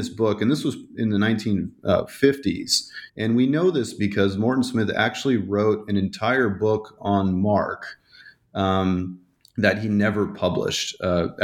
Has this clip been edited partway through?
yes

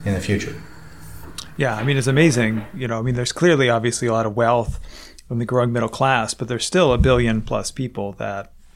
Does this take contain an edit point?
no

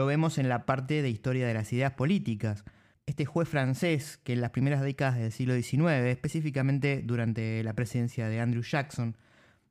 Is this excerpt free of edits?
no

